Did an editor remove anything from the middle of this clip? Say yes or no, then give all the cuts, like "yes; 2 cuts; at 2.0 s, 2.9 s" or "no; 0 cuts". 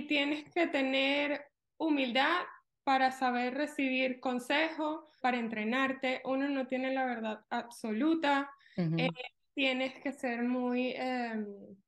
yes; 1 cut; at 5.2 s